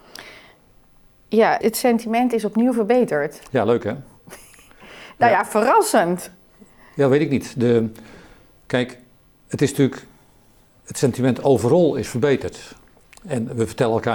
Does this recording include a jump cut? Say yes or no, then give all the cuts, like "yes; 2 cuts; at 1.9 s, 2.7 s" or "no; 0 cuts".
yes; 1 cut; at 1.6 s